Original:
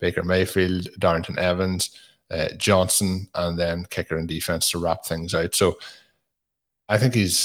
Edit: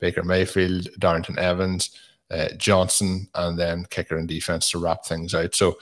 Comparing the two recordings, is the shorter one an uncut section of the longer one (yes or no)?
yes